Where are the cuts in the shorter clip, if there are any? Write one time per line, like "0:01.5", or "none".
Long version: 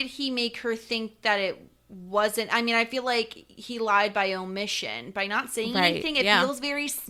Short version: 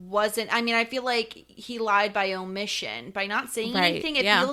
none